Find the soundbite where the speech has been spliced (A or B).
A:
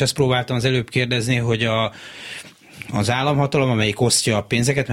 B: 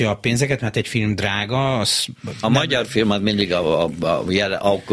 B